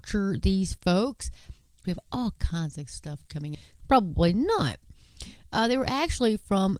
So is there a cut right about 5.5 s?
no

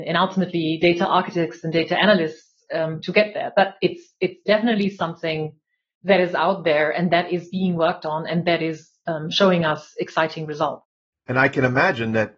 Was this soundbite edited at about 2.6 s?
no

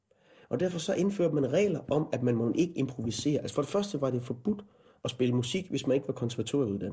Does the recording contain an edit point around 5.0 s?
no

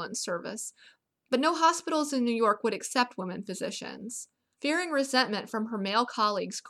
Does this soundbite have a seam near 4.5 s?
yes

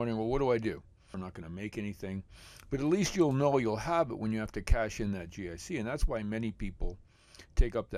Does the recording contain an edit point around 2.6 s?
no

